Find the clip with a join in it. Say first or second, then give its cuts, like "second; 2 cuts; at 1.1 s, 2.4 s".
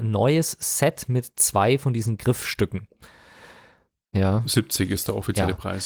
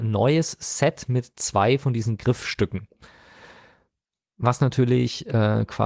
first; 1 cut; at 4.1 s